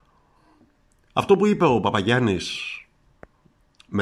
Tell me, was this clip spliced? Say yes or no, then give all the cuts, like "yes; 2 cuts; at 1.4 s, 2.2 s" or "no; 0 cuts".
no; 0 cuts